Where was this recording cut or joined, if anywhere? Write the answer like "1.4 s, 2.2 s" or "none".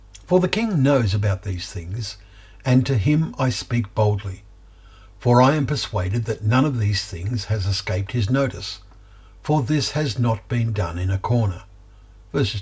none